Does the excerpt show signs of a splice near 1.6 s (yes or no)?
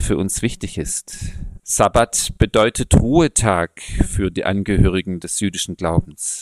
yes